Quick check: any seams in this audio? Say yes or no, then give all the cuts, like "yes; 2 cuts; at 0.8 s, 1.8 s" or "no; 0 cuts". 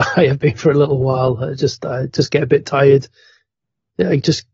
no; 0 cuts